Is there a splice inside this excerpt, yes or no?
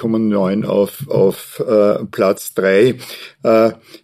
no